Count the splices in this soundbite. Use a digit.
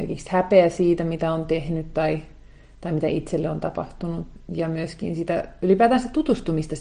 0